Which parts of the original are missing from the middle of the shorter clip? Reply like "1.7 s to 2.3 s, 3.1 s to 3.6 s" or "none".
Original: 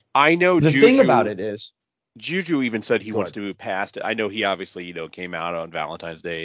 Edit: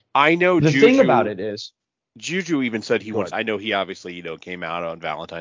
3.3 s to 4.0 s